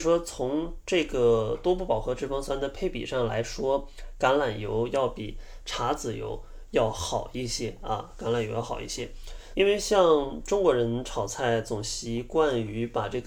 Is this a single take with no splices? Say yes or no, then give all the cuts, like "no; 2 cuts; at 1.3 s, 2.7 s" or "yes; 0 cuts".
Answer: no; 1 cut; at 9.5 s